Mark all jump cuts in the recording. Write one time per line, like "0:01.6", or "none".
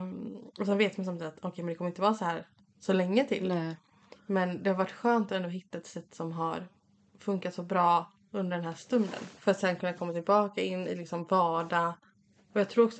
0:09.3